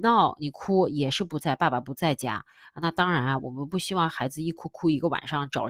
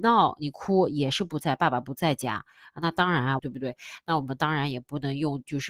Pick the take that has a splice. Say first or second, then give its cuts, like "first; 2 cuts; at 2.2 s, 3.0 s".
second; 1 cut; at 3.4 s